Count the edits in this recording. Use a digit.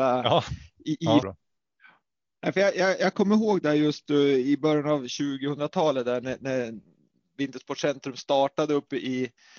1